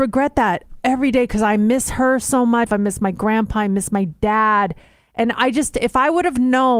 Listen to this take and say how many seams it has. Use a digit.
1